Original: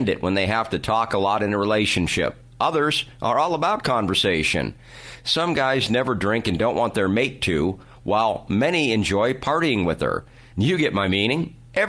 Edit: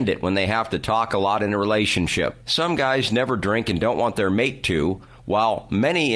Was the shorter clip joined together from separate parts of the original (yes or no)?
yes